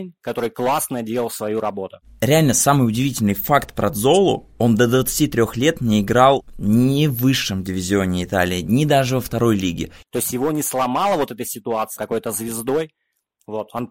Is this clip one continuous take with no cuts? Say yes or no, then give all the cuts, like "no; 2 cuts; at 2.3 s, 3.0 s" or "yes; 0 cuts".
no; 2 cuts; at 10.0 s, 12.0 s